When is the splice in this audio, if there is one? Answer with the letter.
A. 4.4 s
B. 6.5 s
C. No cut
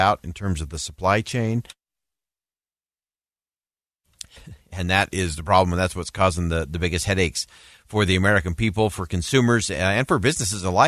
A